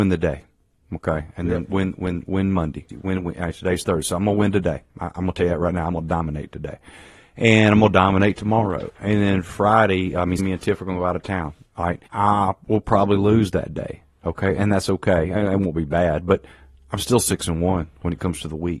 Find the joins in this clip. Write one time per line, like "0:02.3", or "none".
0:02.9
0:10.4
0:12.1